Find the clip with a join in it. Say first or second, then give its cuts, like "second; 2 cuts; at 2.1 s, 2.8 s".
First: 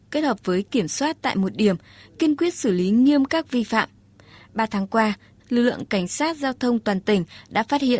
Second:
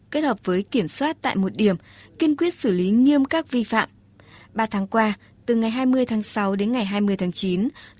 first; 1 cut; at 5.4 s